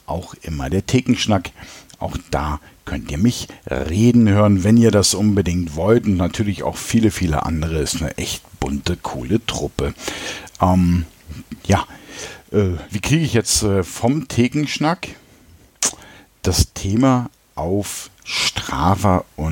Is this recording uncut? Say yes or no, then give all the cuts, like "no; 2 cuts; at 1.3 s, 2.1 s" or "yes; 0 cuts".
no; 1 cut; at 12.9 s